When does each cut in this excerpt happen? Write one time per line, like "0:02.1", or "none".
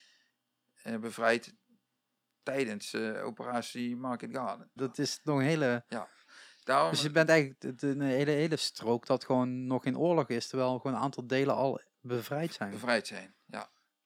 0:04.8

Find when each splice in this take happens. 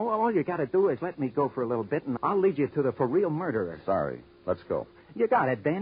0:02.2

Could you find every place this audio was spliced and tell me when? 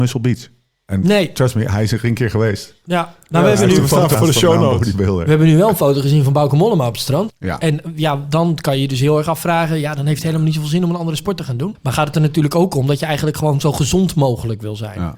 0:04.1
0:07.3
0:11.7

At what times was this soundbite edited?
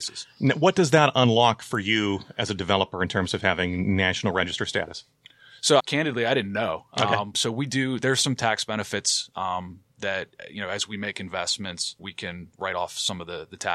0:05.8
0:07.3
0:12.0

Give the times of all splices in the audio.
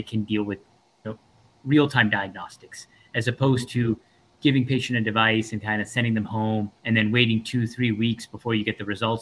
0:06.8

